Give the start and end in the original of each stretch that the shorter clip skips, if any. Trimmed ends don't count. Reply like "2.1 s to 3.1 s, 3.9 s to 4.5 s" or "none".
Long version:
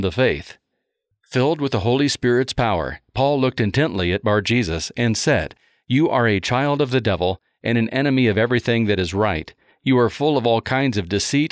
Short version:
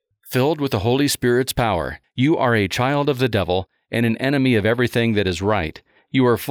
3.0 s to 5.8 s